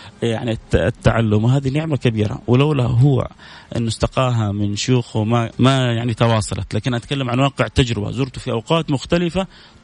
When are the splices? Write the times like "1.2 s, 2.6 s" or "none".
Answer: 5.5 s